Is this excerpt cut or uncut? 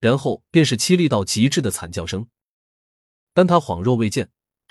cut